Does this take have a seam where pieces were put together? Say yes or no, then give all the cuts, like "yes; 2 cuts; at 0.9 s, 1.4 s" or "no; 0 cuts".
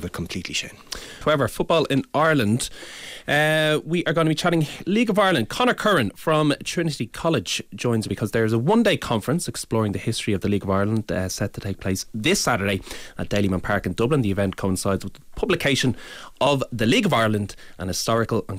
yes; 2 cuts; at 1.2 s, 8.1 s